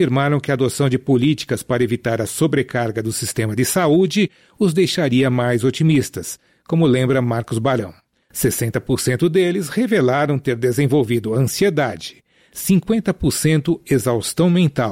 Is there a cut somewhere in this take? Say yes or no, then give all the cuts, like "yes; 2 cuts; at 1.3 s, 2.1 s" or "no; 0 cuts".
yes; 1 cut; at 8.2 s